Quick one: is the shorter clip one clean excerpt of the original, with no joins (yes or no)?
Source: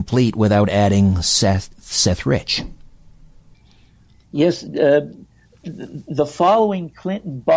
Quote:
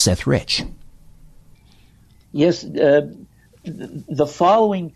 yes